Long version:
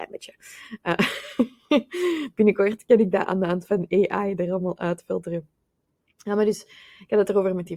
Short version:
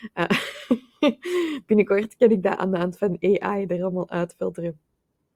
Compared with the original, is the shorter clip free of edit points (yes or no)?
yes